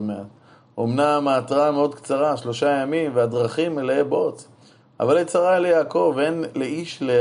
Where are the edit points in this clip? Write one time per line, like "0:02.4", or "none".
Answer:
none